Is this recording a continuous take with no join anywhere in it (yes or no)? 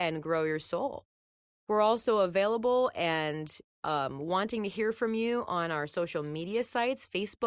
yes